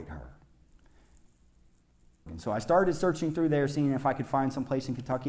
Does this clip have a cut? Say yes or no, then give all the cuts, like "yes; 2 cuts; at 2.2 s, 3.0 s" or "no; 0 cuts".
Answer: yes; 1 cut; at 2.3 s